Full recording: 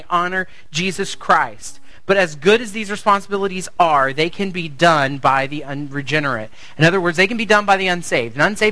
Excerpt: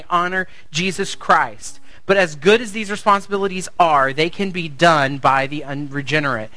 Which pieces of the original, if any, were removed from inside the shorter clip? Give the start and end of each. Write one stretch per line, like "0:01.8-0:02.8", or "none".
none